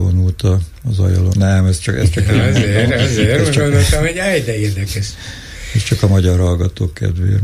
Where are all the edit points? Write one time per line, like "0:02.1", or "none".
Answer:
0:01.3